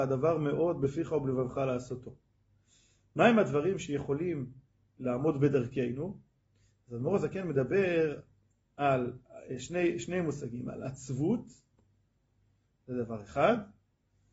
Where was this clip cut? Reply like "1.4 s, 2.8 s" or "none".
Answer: none